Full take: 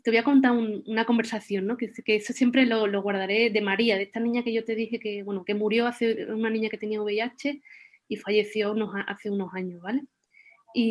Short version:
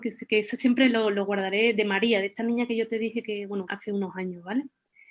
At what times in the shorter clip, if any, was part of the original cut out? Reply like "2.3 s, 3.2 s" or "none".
3.7 s